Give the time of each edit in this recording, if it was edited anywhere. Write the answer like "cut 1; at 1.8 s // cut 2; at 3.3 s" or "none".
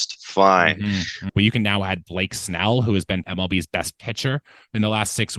cut 1; at 1.3 s // cut 2; at 3.2 s

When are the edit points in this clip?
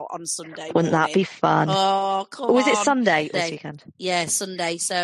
cut 1; at 3.3 s

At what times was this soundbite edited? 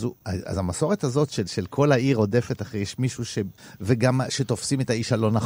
cut 1; at 1.5 s

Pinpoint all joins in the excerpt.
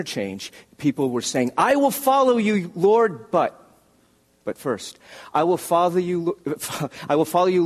none

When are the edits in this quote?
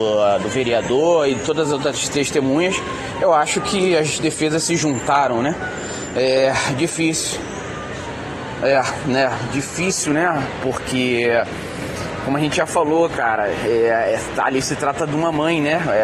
none

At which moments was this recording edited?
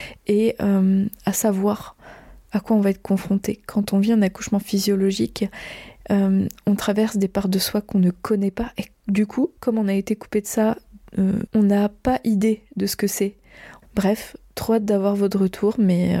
cut 1; at 9.6 s // cut 2; at 11.5 s // cut 3; at 13.8 s

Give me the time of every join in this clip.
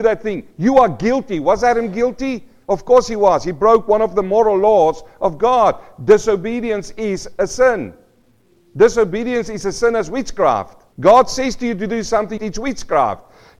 cut 1; at 10.9 s // cut 2; at 12.4 s

